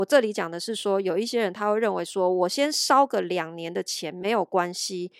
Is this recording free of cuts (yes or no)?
yes